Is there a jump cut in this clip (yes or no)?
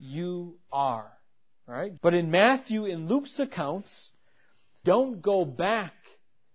yes